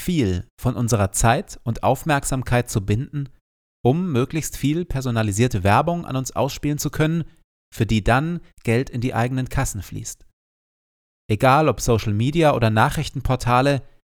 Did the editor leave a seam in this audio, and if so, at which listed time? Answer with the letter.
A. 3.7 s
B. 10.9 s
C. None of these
C